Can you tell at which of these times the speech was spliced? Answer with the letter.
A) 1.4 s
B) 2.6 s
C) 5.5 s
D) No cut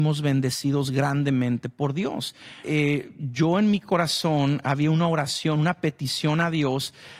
B